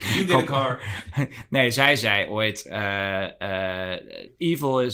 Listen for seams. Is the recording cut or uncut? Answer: uncut